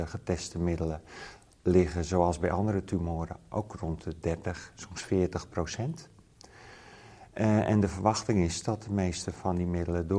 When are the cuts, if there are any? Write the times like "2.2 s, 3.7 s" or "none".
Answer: none